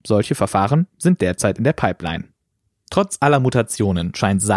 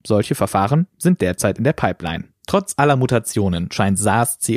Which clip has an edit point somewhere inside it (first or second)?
second